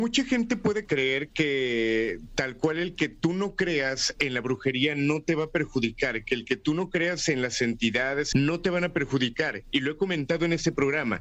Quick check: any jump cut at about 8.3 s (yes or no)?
yes